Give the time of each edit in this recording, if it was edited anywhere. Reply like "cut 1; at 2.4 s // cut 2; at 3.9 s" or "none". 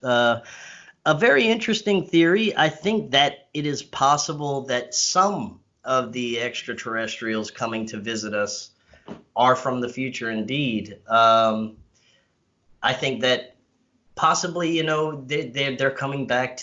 none